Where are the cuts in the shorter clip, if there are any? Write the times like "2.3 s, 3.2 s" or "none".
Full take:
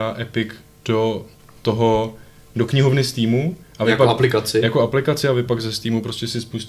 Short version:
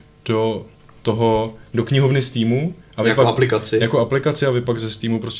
1.7 s